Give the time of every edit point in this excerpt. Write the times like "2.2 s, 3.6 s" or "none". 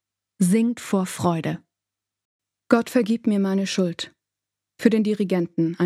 none